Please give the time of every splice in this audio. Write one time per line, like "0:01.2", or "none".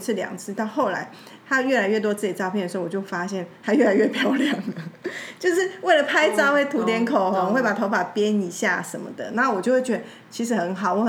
none